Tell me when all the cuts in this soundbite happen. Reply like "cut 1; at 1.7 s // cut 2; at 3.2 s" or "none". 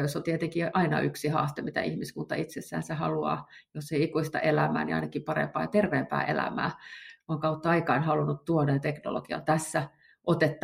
none